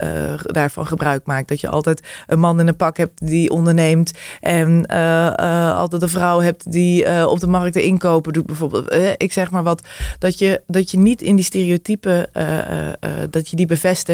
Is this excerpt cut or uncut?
uncut